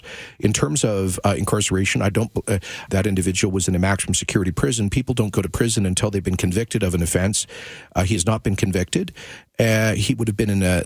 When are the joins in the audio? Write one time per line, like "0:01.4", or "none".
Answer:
0:02.9